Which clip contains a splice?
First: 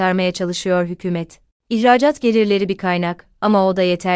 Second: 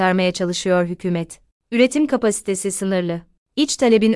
second; 1 cut; at 1.5 s

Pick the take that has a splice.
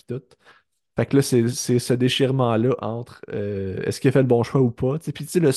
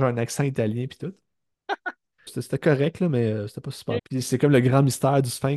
second; 2 cuts; at 2.3 s, 4.0 s

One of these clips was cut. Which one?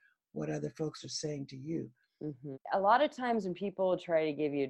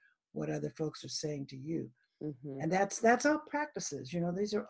first; 1 cut; at 2.5 s

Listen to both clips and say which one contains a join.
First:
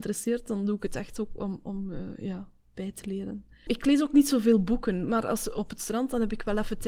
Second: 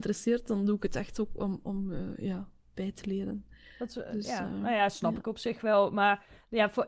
first; 1 cut; at 3.7 s

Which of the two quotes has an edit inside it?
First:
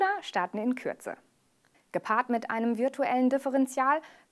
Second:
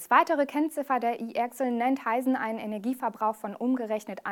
first; 1 cut; at 1.7 s

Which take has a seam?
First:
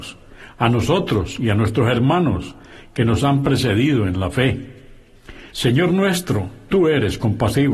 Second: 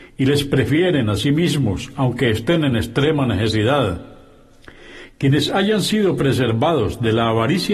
first; 1 cut; at 5.5 s

